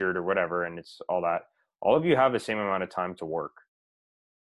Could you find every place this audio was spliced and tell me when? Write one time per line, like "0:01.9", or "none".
none